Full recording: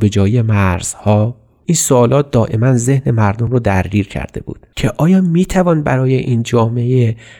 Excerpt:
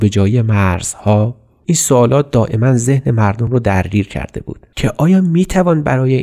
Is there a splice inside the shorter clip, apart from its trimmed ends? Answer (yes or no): no